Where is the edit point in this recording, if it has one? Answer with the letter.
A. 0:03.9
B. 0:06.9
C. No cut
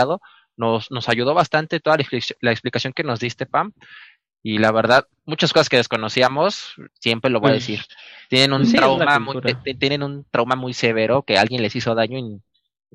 B